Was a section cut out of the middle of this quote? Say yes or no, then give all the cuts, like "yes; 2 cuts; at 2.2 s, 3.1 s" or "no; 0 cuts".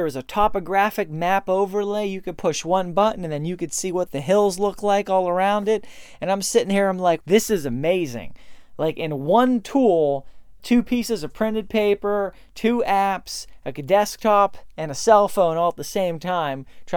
yes; 2 cuts; at 7.2 s, 10.6 s